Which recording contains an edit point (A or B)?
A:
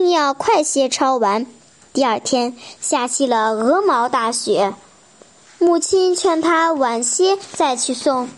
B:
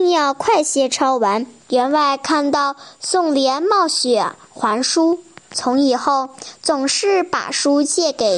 B